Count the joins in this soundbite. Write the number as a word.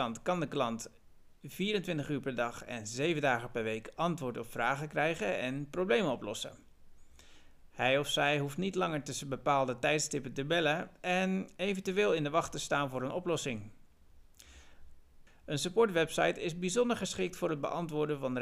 one